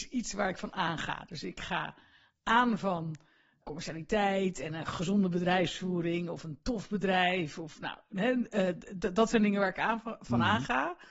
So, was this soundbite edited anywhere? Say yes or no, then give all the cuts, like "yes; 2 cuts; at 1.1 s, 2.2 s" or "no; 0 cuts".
yes; 1 cut; at 3.6 s